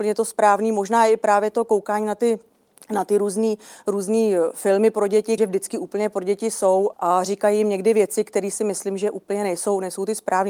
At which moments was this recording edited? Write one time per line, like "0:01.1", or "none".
0:05.4
0:06.9

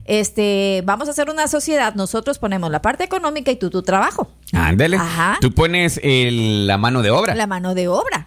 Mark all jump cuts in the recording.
none

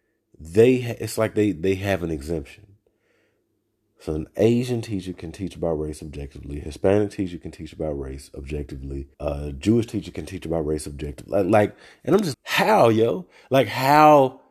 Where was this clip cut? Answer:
0:09.1
0:12.3

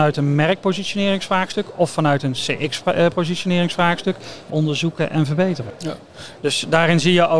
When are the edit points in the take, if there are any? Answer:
0:04.5
0:06.4

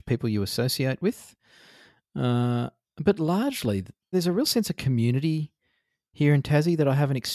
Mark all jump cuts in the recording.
0:04.1

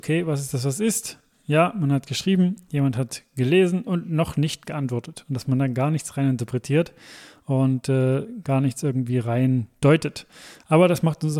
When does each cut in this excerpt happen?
none

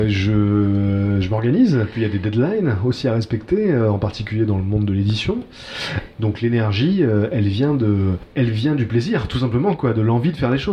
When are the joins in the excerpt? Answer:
0:06.1

